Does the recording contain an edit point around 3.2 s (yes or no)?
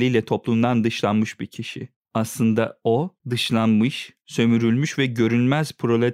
yes